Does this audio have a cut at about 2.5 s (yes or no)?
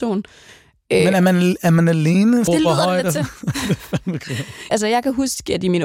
yes